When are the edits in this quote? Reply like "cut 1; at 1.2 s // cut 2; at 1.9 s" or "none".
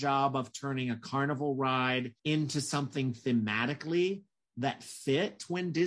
cut 1; at 2.2 s